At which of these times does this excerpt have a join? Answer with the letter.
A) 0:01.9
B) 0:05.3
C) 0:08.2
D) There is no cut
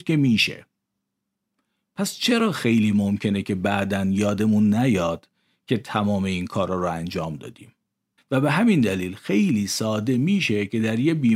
C